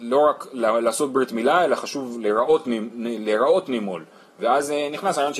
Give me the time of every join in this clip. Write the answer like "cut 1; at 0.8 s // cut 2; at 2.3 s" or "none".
none